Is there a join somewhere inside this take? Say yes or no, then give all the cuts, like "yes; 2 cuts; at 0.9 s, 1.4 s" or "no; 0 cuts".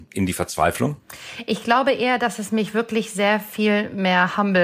no; 0 cuts